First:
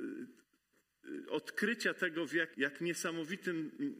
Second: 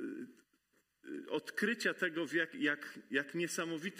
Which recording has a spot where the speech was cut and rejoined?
first; 1 cut; at 2.5 s

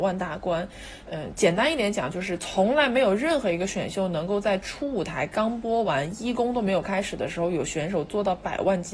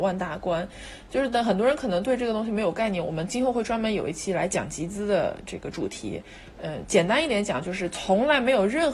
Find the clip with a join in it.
first; 1 cut; at 1.0 s

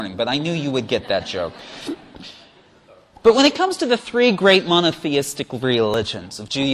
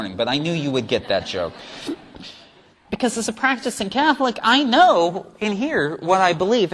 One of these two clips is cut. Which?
second; 1 cut; at 2.7 s

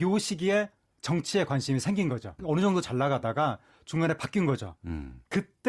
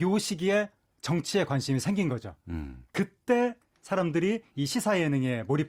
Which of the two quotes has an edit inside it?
first; 2 cuts; at 2.4 s, 4.8 s

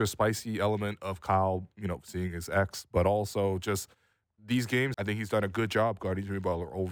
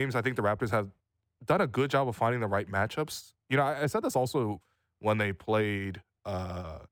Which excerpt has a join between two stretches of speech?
first; 1 cut; at 4.9 s

